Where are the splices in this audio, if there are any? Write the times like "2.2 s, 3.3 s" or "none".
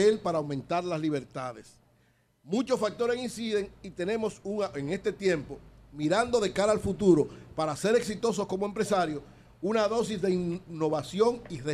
none